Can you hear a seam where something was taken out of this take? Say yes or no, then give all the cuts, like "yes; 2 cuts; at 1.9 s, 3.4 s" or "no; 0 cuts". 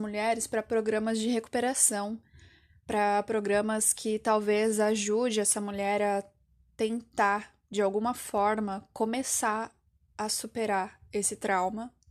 no; 0 cuts